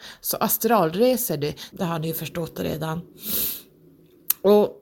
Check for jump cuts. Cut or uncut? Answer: cut